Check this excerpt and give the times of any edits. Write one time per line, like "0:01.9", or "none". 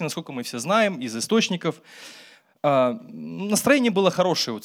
none